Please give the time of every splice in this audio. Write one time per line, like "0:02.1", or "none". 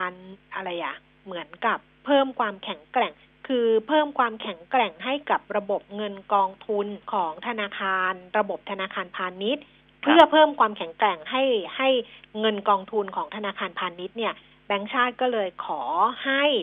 0:07.0